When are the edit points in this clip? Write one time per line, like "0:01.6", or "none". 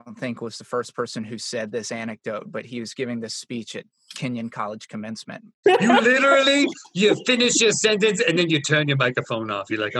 0:05.6